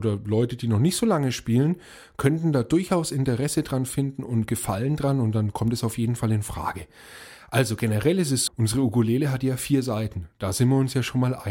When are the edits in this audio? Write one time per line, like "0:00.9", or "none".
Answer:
0:08.5